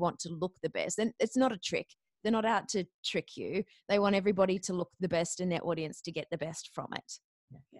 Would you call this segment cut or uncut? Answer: uncut